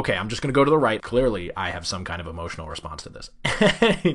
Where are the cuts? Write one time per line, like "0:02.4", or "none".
0:01.0